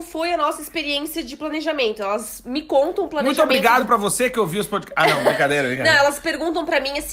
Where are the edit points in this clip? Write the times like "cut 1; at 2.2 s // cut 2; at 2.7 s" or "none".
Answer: none